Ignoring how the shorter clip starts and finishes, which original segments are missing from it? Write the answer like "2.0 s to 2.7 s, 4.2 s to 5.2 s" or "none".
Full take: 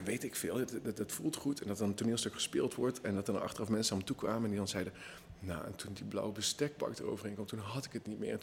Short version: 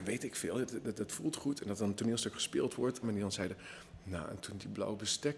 3.0 s to 4.4 s